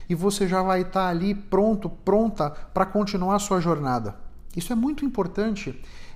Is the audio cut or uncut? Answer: uncut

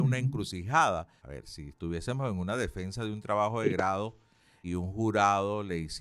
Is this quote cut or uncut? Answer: cut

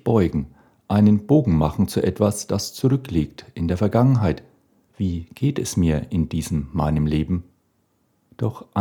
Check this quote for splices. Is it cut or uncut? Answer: cut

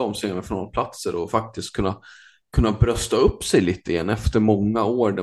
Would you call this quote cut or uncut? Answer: uncut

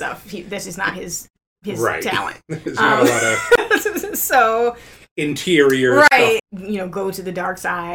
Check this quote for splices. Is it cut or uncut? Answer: cut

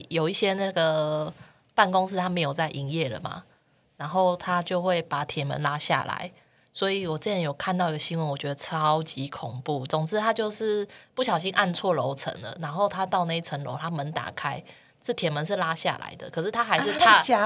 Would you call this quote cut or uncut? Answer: uncut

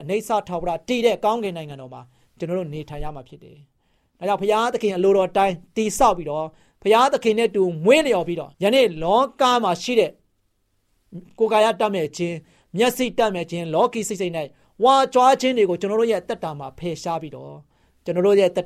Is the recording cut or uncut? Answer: cut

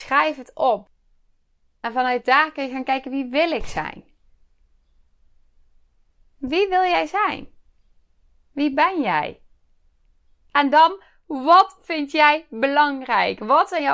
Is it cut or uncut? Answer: uncut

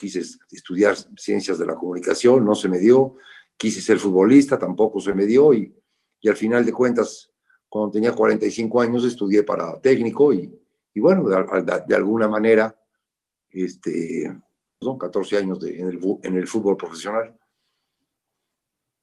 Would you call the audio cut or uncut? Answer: cut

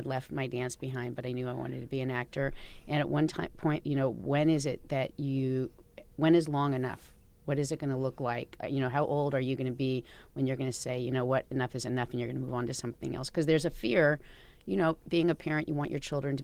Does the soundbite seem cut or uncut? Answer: cut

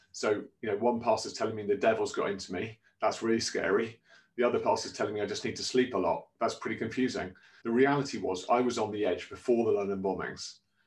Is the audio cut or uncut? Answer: cut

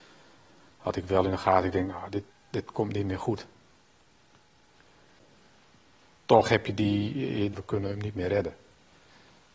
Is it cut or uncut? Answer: cut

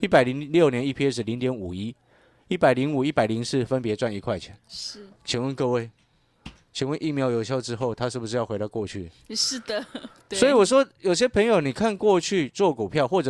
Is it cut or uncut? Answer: uncut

